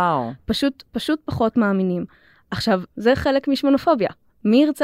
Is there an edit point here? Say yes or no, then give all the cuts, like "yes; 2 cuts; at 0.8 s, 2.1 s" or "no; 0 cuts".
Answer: yes; 1 cut; at 2.9 s